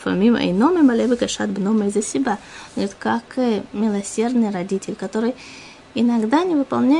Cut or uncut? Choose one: cut